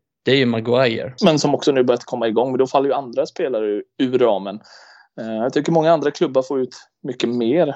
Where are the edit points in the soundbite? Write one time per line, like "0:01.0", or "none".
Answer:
0:01.2

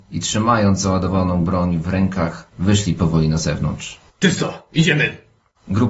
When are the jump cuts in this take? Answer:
0:04.1

